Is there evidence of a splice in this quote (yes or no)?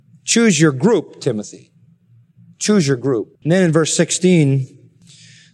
yes